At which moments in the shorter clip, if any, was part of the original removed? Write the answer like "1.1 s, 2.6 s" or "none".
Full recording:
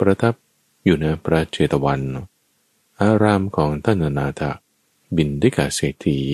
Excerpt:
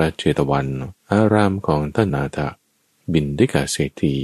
1.0 s, 2.1 s